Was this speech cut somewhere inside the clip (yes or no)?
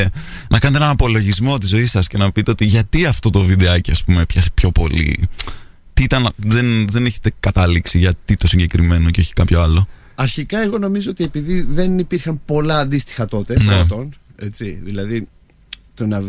no